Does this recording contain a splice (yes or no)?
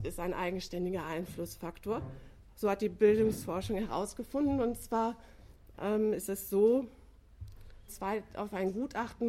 yes